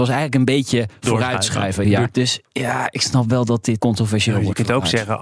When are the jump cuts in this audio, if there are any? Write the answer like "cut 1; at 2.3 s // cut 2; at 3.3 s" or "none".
cut 1; at 2.1 s // cut 2; at 3.8 s